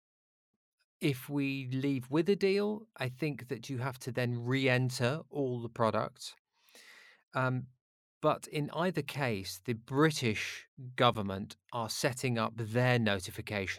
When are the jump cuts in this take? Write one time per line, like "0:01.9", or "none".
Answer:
none